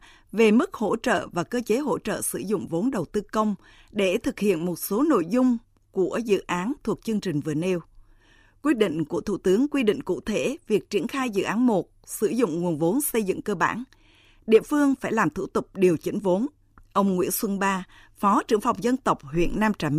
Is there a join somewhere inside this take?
no; 0 cuts

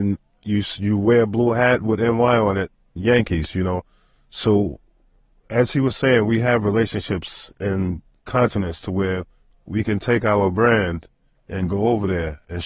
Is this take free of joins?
yes; 0 cuts

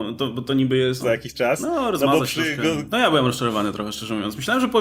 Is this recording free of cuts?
no; 2 cuts; at 1.0 s, 2.9 s

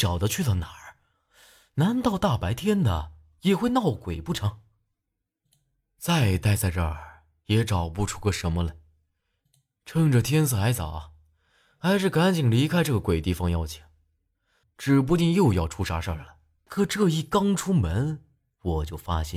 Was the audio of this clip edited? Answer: yes; 2 cuts; at 14.6 s, 16.7 s

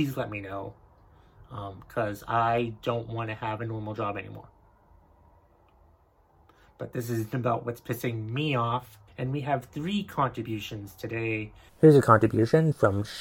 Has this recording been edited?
yes; 2 cuts; at 9.1 s, 11.7 s

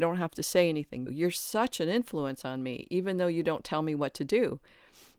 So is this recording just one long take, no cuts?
no; 1 cut; at 1.1 s

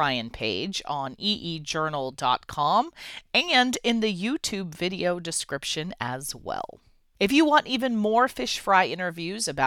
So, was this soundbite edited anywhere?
no; 0 cuts

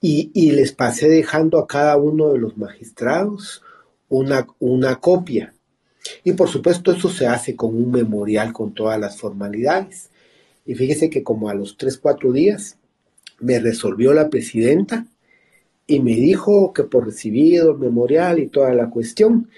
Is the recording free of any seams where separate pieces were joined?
yes; 0 cuts

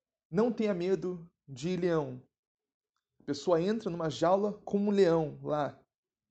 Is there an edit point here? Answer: no; 0 cuts

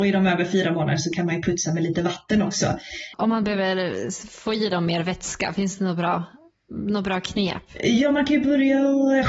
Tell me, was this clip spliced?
yes; 1 cut; at 3.1 s

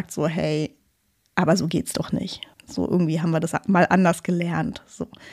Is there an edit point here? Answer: yes; 1 cut; at 2.5 s

